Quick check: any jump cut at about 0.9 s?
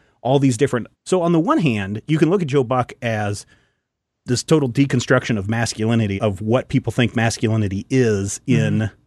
yes; 2 cuts; at 0.9 s, 6.2 s

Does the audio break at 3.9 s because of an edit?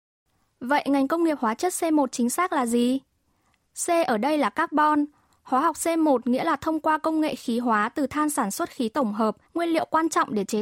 no; 1 cut; at 9.5 s

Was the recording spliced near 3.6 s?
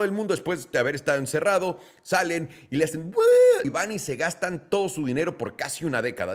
yes; 1 cut; at 3.6 s

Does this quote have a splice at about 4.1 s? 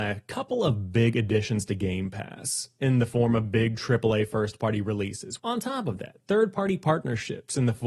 no; 1 cut; at 5.4 s

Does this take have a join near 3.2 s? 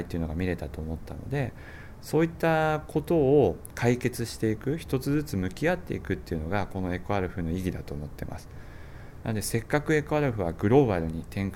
no; 1 cut; at 9.2 s

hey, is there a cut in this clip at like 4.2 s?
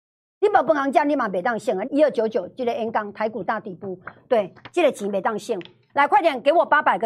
no; 2 cuts; at 1.8 s, 5.9 s

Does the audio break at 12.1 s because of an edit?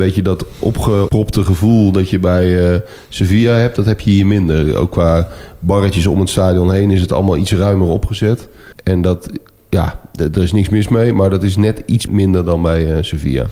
yes; 2 cuts; at 8.7 s, 12.1 s

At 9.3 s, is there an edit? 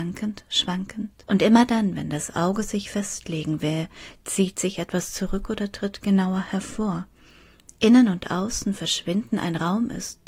no; 1 cut; at 1.2 s

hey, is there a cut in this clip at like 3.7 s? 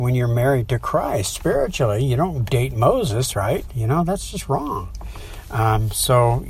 yes; 1 cut; at 3.7 s

